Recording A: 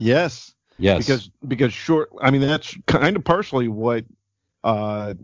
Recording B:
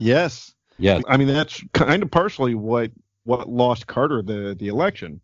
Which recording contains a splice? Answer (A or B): B